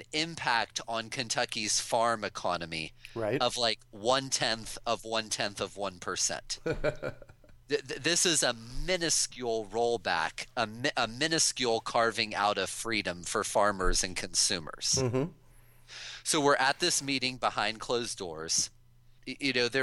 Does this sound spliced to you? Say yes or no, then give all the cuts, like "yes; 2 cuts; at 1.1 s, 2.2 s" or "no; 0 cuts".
no; 0 cuts